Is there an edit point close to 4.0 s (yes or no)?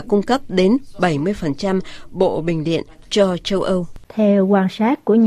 yes